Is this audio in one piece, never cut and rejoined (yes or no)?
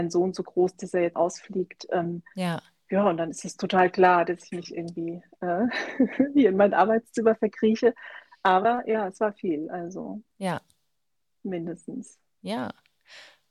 no